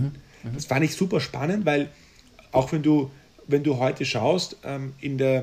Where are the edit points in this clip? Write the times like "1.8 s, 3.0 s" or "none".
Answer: none